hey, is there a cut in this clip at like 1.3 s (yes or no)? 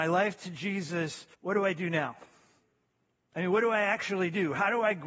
yes